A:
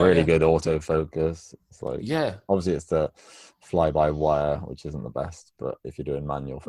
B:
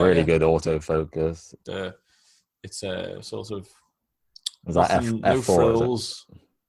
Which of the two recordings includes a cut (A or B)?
B